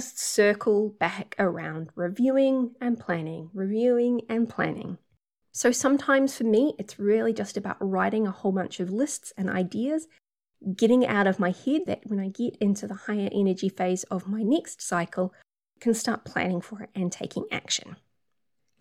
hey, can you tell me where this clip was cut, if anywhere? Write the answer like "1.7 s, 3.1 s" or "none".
5.4 s, 11.9 s